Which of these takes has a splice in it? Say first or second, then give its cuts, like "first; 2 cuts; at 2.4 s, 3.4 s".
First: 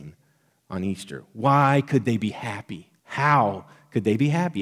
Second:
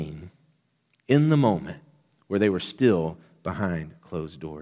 first; 1 cut; at 3.0 s